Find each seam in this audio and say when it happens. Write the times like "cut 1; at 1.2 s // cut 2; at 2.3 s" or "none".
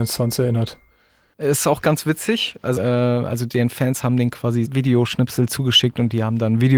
cut 1; at 1.3 s // cut 2; at 2.8 s // cut 3; at 4.7 s